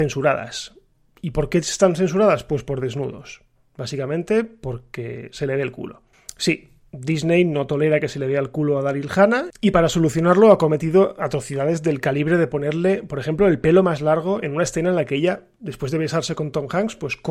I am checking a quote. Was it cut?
no; 0 cuts

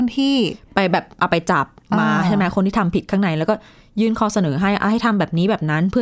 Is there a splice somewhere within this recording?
no; 0 cuts

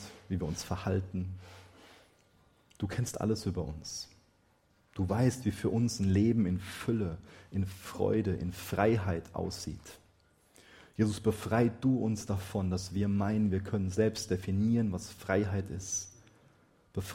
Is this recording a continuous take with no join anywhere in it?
yes; 0 cuts

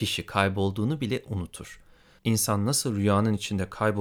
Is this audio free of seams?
no; 1 cut; at 2.2 s

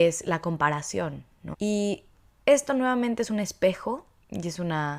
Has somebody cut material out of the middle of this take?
yes; 1 cut; at 1.5 s

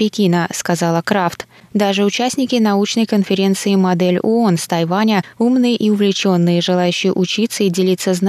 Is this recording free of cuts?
yes; 0 cuts

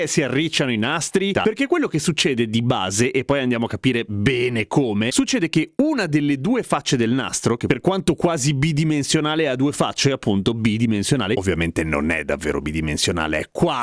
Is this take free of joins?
no; 1 cut; at 1.3 s

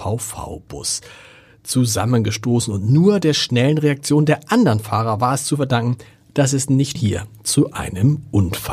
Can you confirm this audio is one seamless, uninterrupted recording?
no; 1 cut; at 7.0 s

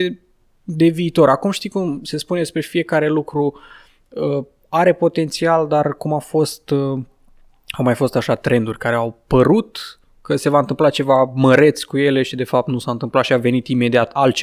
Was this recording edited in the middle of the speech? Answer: no; 0 cuts

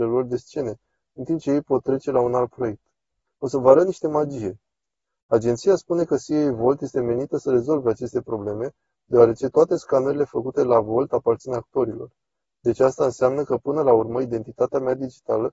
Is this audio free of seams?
no; 1 cut; at 3.3 s

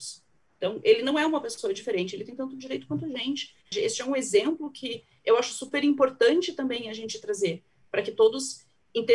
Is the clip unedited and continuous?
no; 1 cut; at 3.7 s

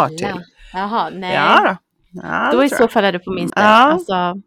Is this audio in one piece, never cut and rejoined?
no; 1 cut; at 3.5 s

